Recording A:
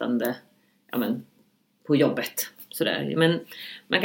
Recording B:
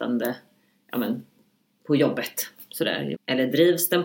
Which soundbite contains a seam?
B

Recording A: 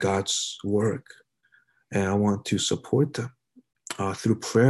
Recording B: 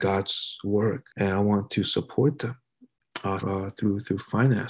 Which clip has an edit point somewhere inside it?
B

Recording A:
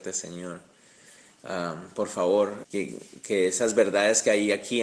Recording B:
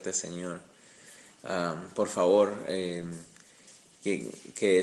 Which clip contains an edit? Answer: A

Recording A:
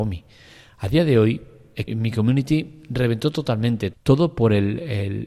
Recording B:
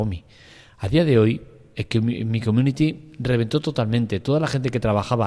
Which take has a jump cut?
A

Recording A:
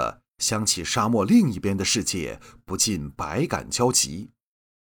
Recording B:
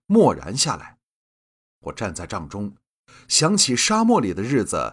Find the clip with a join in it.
B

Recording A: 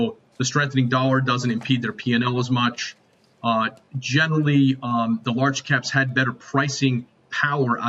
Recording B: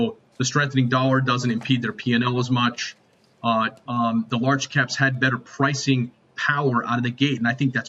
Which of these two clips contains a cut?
B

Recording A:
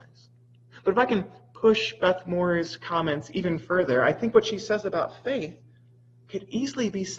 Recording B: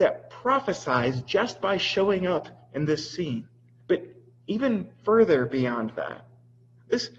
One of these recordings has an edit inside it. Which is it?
B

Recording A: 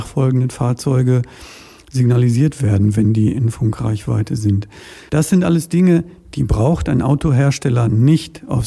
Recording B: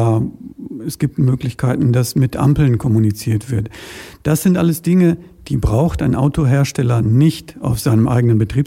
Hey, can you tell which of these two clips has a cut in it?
A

